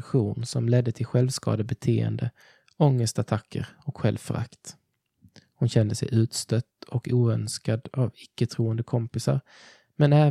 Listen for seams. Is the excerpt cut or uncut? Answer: uncut